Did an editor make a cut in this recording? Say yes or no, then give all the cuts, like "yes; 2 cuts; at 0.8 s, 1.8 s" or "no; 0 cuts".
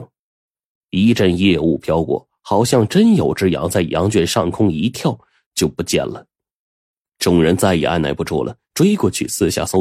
no; 0 cuts